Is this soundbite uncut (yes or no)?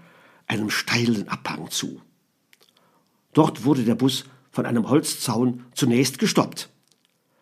yes